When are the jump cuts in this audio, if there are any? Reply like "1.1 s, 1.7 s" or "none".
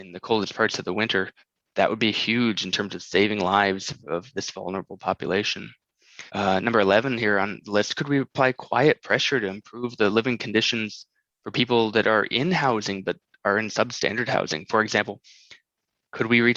6.3 s

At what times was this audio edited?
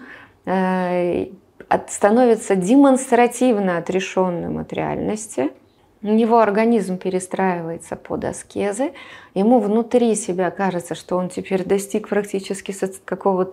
none

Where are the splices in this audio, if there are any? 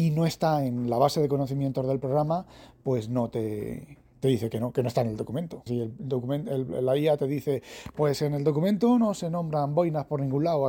5.7 s

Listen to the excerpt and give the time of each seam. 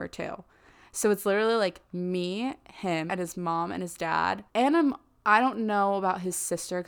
3.1 s, 4.5 s

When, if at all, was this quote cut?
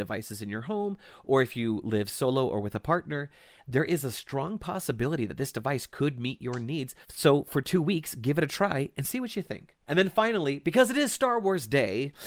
7.0 s, 9.8 s

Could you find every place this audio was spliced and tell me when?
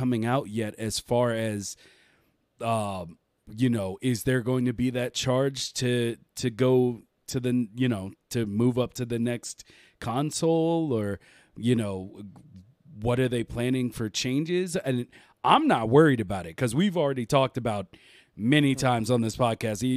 none

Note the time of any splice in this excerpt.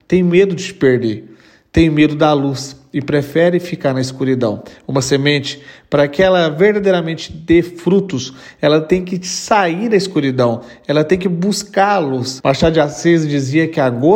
12.4 s

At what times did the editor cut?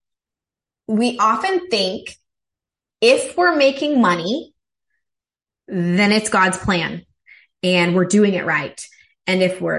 none

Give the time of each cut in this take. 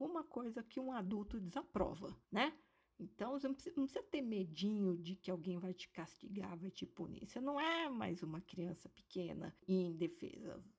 2.2 s

